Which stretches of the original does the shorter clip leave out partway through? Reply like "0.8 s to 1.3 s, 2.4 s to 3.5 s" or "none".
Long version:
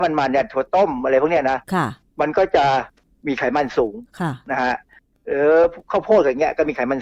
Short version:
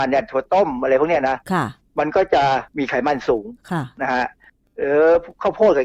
2.9 s to 3.2 s

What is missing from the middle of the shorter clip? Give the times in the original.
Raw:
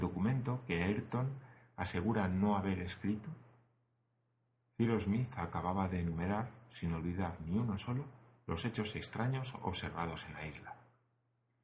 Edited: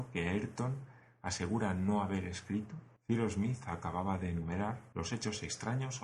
3.5 s to 4.7 s, 6.6 s to 8.4 s

